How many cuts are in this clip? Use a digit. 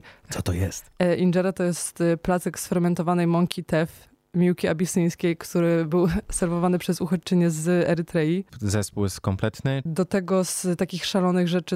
2